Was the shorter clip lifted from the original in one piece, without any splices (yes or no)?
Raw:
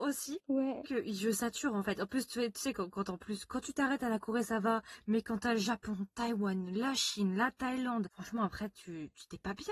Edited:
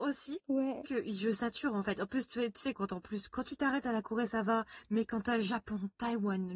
no